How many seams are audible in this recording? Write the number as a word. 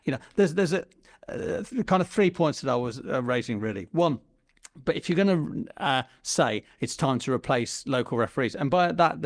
zero